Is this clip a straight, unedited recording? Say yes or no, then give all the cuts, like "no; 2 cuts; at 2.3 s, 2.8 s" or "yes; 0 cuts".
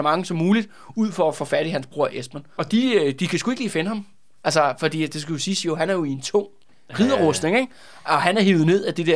yes; 0 cuts